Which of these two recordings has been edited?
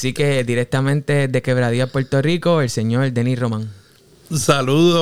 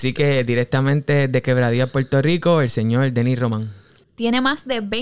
second; 1 cut; at 4.0 s

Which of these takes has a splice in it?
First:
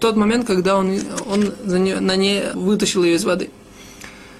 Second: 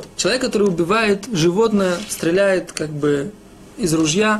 first; 2 cuts; at 1.2 s, 2.5 s

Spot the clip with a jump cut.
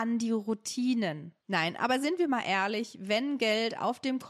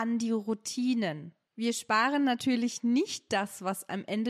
first; 1 cut; at 1.4 s

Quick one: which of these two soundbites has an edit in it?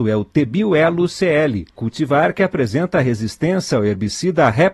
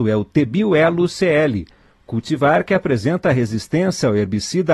first; 1 cut; at 1.7 s

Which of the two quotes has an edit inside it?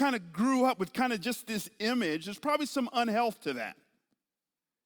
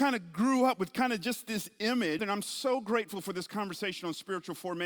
second; 1 cut; at 2.2 s

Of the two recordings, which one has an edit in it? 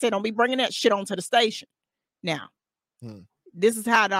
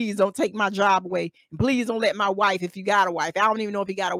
first; 1 cut; at 2.1 s

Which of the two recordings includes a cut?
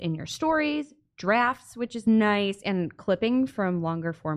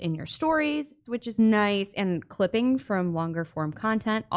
second; 1 cut; at 1.1 s

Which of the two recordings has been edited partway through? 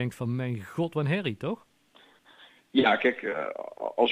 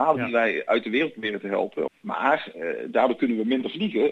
second; 1 cut; at 1.9 s

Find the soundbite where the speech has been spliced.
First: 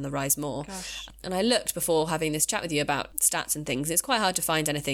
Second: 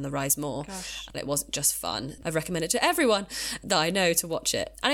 second; 1 cut; at 1.1 s

